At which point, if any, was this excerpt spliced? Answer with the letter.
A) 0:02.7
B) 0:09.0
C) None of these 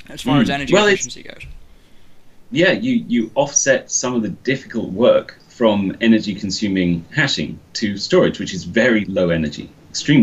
B